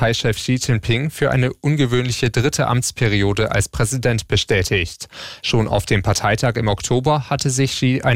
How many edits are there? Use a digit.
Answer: 1